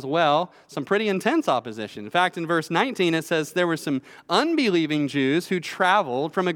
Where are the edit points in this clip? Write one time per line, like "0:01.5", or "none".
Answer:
none